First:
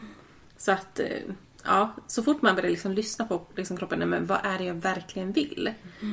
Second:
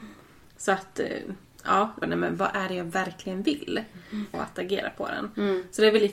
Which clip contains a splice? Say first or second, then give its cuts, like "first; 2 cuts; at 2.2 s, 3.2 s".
second; 2 cuts; at 2.0 s, 4.3 s